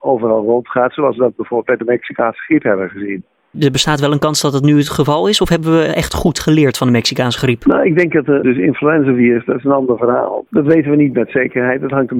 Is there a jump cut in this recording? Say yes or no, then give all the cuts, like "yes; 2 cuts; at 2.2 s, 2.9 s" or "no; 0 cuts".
yes; 2 cuts; at 8.4 s, 10.5 s